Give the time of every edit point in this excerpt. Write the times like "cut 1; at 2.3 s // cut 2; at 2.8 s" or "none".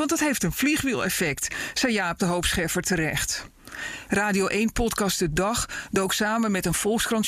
cut 1; at 4.1 s